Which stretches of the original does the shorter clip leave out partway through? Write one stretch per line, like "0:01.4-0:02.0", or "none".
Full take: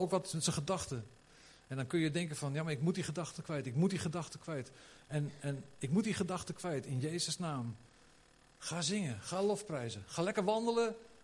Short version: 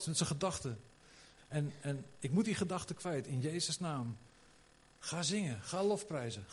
0:01.6-0:05.0